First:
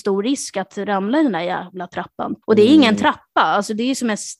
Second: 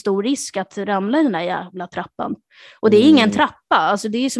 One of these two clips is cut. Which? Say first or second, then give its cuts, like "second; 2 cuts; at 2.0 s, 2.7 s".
first; 1 cut; at 2.4 s